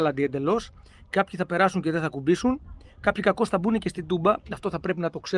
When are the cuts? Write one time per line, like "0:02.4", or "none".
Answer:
none